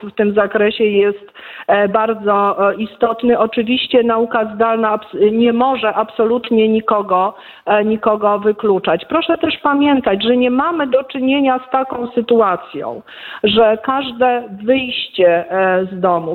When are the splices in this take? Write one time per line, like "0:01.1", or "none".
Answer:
0:01.9